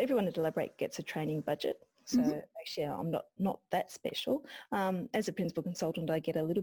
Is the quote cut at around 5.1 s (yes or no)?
no